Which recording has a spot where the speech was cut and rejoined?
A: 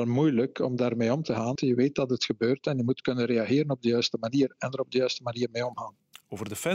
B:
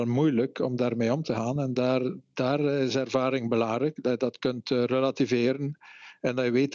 A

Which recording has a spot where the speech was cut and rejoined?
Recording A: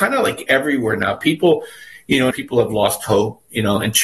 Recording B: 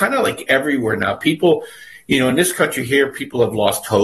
A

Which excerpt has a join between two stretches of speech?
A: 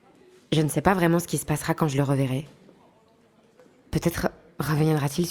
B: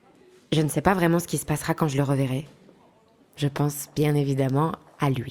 B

